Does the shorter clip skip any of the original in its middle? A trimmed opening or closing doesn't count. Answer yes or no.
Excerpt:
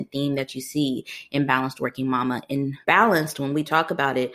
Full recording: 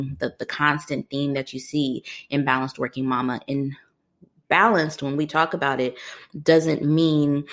yes